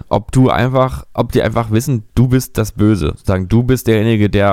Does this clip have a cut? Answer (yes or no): no